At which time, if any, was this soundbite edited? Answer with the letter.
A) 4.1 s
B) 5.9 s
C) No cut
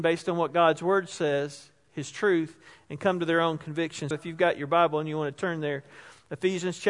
A